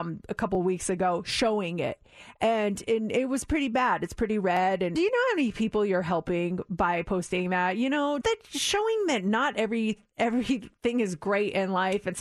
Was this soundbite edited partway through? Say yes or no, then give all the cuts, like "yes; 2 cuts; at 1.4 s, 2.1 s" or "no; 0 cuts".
yes; 2 cuts; at 4.9 s, 8.2 s